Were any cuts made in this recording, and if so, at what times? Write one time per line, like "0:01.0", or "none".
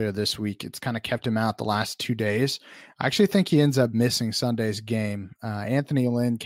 none